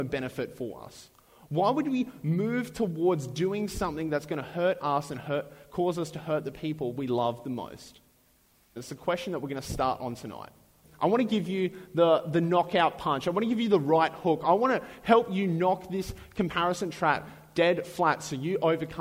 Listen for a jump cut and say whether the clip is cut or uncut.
cut